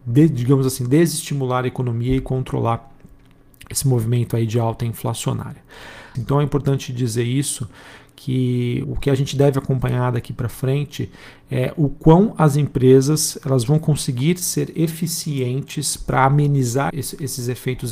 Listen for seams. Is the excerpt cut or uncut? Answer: cut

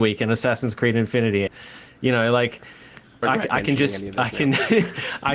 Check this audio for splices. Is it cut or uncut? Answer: cut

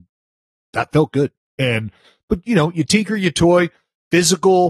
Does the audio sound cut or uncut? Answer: cut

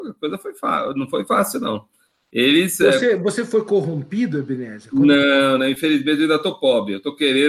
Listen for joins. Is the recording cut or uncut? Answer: uncut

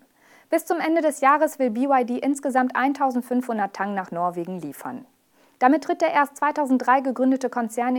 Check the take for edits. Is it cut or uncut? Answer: uncut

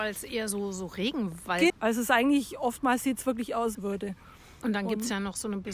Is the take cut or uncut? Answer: cut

